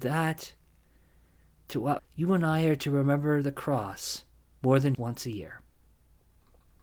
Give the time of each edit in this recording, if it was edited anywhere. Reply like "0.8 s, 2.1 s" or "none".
2.0 s, 4.9 s